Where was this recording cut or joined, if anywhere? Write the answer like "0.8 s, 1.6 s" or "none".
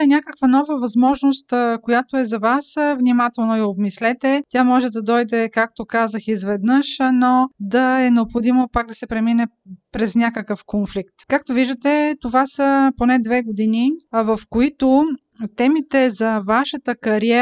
11.2 s

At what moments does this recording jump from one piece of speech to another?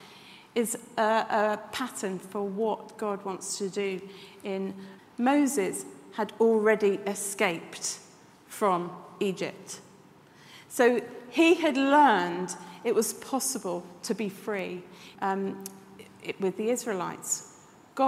5.0 s, 15.1 s

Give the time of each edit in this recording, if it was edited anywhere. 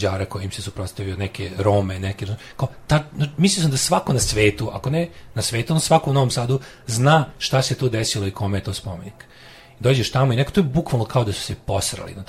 none

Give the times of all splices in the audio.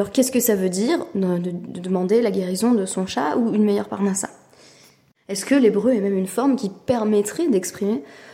none

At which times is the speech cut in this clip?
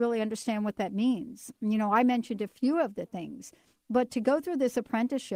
none

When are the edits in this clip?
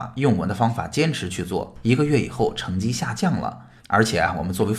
3.8 s

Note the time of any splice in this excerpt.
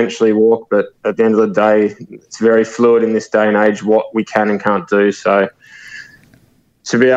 none

